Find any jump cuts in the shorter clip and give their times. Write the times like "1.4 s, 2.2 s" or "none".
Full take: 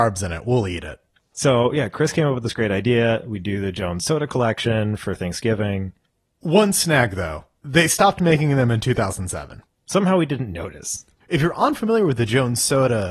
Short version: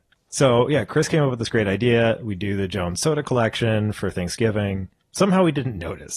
5.0 s